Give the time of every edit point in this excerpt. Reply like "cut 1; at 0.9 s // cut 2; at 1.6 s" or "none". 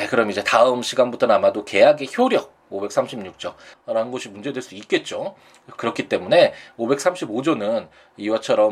cut 1; at 3.7 s